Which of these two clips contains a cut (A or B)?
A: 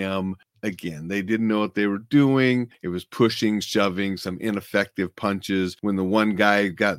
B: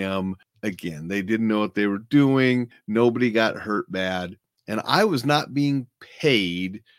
A